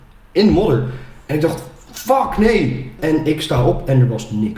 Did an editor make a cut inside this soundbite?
yes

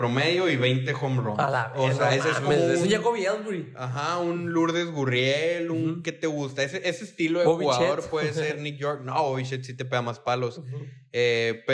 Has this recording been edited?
no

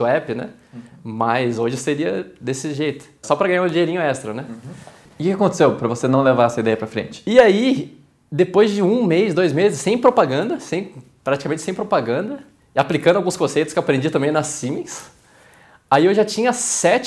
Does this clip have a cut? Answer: yes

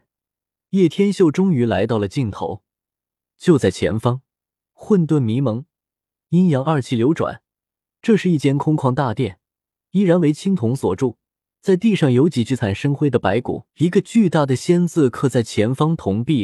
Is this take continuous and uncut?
no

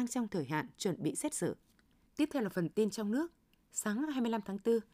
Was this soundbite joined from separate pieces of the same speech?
yes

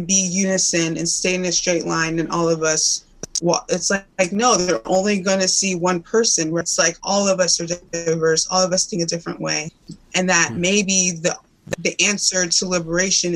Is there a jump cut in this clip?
no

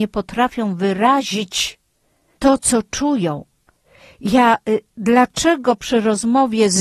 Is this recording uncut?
no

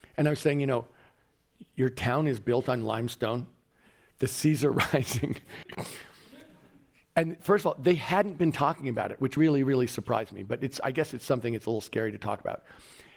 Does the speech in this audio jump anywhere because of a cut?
yes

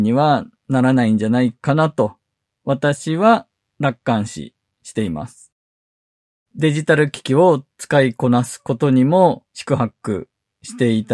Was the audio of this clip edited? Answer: yes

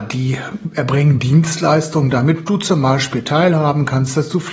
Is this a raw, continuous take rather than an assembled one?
yes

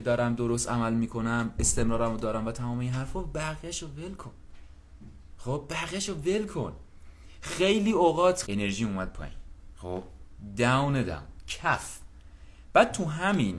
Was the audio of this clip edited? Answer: yes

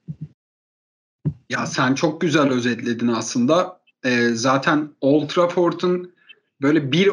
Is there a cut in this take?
no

